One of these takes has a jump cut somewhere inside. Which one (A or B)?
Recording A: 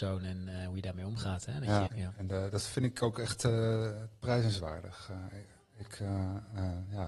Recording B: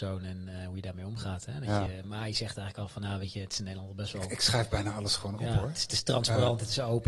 A